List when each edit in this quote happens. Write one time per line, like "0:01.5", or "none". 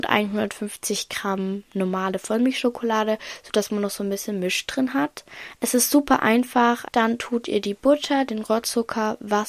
0:06.8